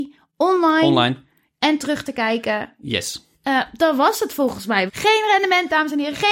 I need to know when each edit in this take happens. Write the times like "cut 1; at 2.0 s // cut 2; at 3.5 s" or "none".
cut 1; at 3.3 s // cut 2; at 4.9 s